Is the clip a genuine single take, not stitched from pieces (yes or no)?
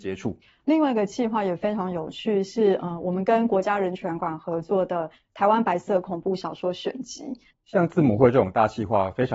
no